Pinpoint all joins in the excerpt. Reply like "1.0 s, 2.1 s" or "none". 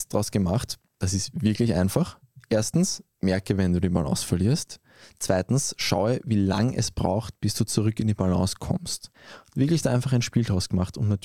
none